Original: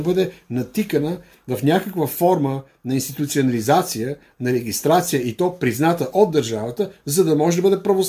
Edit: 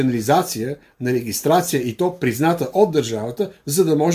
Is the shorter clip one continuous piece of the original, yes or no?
yes